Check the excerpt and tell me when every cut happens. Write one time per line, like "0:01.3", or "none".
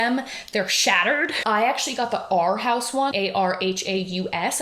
0:01.4
0:03.1